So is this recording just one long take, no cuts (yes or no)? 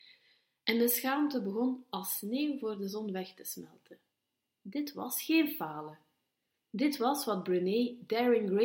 yes